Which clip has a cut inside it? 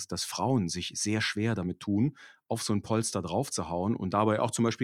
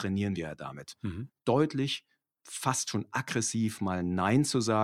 second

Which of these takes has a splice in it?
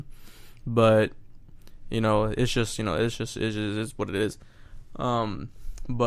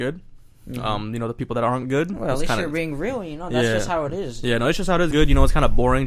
second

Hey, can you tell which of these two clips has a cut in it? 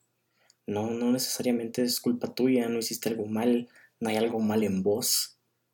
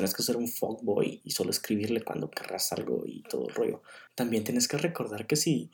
second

